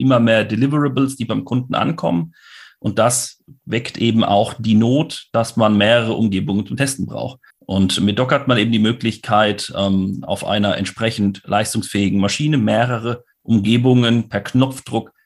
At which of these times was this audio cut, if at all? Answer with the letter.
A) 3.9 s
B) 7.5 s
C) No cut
B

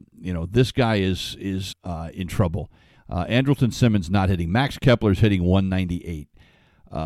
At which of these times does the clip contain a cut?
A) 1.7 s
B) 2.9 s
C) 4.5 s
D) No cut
A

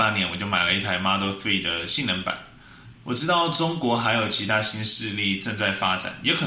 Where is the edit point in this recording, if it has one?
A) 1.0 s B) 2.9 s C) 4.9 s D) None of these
B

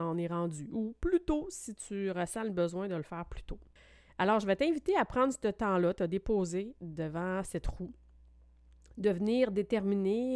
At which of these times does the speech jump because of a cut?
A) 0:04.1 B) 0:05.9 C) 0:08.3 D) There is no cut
D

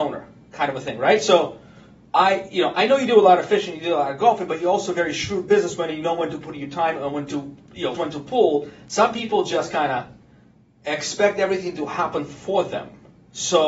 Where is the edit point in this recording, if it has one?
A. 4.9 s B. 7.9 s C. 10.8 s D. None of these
B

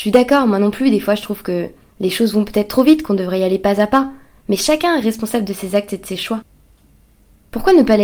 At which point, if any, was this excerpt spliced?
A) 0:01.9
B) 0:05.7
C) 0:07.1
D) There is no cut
A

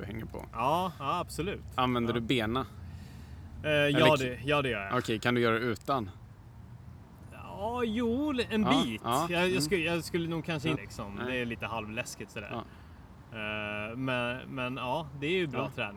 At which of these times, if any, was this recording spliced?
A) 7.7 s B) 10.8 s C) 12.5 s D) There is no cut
B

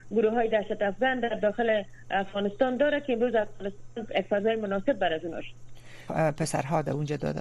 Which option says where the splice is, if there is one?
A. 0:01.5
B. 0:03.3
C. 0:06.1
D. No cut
C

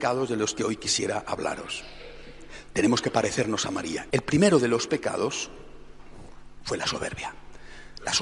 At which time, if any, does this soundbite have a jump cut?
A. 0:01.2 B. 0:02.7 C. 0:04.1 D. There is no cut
C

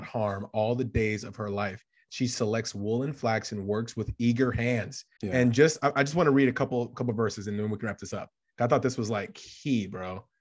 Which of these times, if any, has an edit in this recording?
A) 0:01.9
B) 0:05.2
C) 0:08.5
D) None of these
B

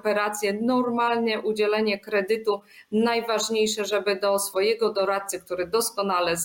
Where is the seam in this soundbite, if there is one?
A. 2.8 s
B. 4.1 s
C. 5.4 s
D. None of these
D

